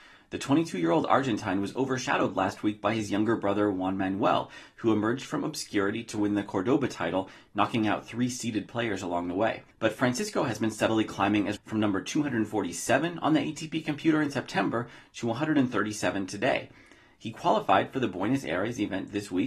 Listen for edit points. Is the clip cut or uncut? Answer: cut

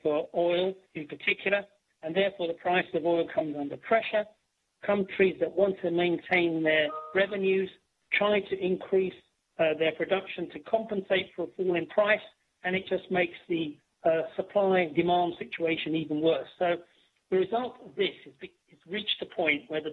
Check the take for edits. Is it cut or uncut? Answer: uncut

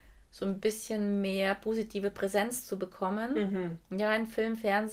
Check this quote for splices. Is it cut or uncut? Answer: uncut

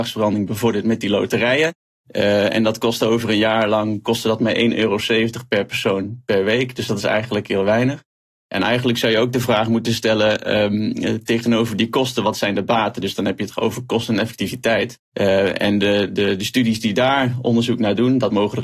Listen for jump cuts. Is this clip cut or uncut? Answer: uncut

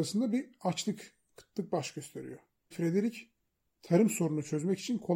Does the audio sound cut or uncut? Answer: cut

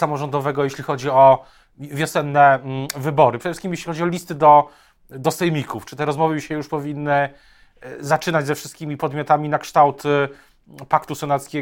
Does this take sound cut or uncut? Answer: uncut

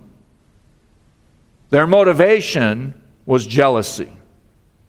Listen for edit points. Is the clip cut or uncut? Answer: uncut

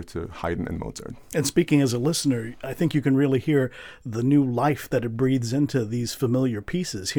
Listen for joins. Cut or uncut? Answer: uncut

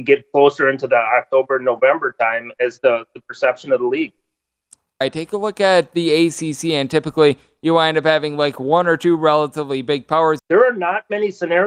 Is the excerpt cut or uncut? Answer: cut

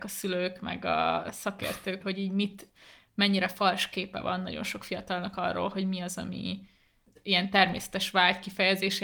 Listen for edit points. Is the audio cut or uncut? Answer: cut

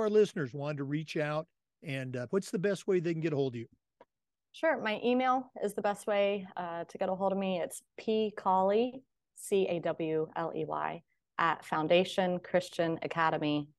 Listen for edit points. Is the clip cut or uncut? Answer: cut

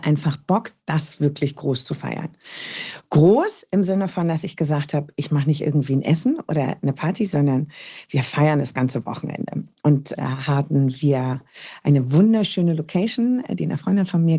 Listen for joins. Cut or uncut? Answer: uncut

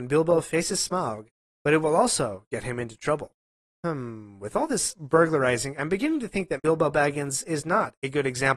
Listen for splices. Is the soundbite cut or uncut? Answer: cut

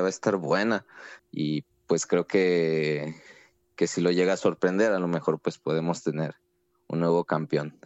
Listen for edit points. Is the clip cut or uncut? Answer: cut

